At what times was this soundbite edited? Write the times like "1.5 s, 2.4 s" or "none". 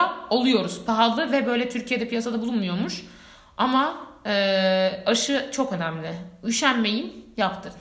none

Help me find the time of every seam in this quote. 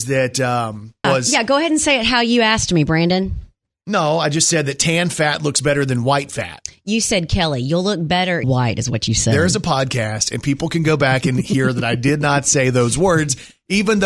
1.0 s, 8.4 s

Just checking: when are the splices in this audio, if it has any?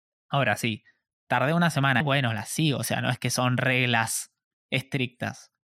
2.0 s

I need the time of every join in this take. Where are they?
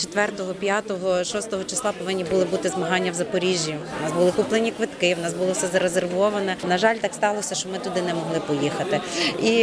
none

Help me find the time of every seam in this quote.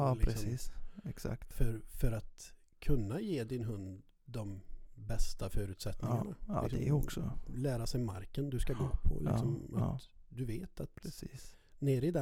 none

